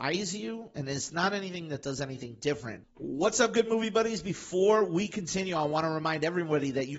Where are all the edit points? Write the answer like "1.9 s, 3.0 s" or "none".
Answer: 2.8 s